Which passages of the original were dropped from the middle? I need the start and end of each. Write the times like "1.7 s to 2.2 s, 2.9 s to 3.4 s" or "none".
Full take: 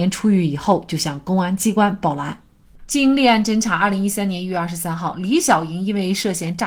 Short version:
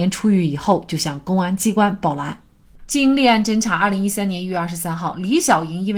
none